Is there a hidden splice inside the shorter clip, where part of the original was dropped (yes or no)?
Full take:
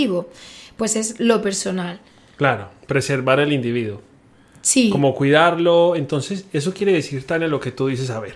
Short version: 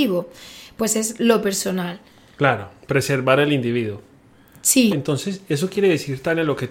yes